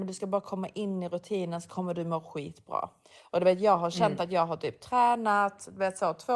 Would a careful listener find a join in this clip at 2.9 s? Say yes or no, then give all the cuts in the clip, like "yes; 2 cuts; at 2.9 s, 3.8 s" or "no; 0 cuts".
no; 0 cuts